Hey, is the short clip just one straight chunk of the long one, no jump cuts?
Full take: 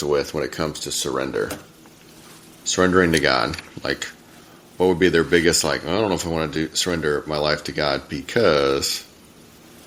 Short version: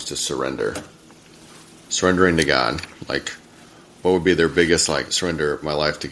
no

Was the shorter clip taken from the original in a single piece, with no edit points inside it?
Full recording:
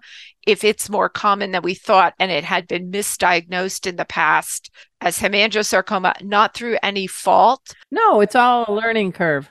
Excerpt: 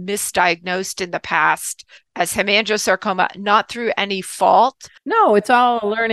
yes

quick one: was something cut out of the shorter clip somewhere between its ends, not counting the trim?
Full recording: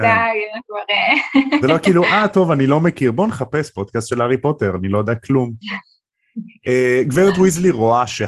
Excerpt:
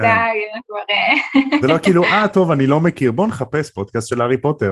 no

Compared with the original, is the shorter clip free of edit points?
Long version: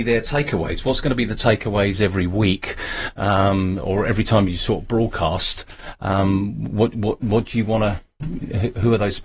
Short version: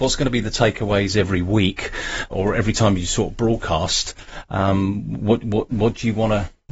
no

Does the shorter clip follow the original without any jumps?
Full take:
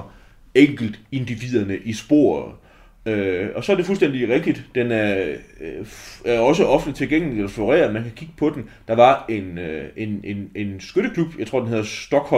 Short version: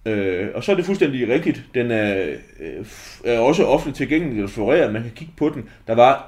yes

